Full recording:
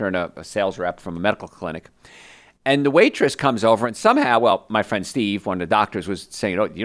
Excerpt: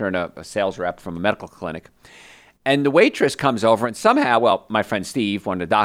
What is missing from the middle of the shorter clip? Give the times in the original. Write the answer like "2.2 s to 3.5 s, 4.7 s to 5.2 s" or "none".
none